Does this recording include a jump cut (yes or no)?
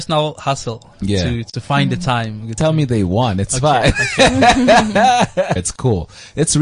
yes